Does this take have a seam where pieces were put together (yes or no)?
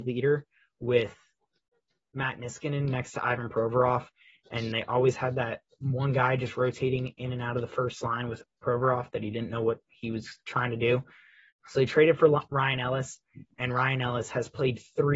yes